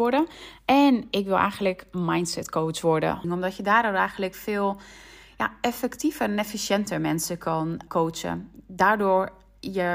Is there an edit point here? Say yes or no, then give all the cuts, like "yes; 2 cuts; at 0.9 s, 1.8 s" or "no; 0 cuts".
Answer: yes; 2 cuts; at 3.2 s, 7.9 s